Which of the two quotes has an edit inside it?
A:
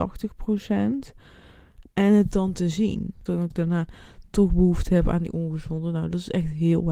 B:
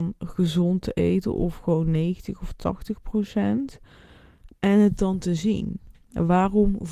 A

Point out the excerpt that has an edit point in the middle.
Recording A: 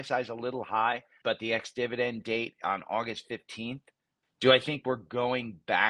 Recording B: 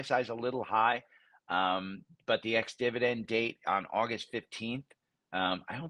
A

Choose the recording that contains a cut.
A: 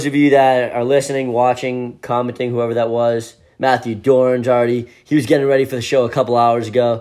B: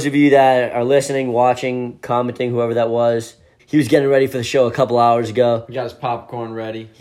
B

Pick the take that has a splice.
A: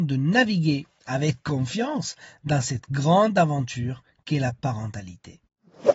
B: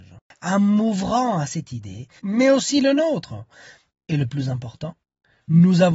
B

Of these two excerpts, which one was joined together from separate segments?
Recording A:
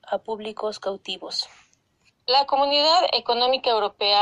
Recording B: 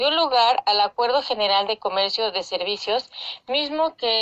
A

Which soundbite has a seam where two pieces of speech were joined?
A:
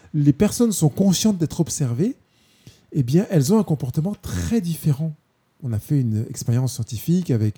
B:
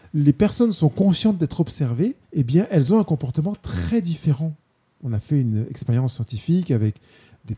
B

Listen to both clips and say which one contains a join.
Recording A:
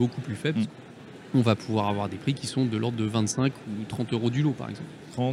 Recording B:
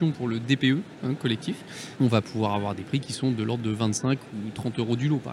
B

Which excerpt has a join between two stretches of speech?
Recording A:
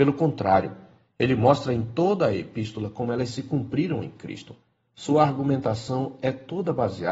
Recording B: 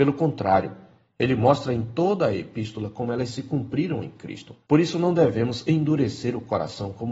B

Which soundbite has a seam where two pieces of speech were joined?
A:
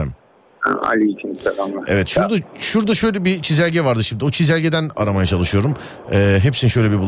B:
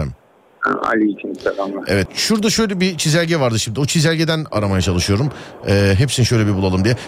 B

